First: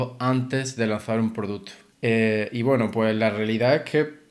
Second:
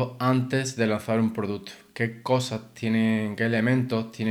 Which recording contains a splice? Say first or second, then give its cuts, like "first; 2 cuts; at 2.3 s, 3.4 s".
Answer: first; 1 cut; at 1.9 s